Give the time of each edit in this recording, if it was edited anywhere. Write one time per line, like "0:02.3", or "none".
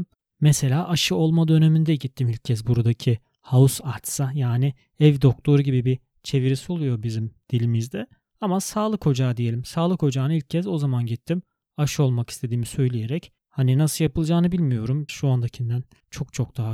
0:15.1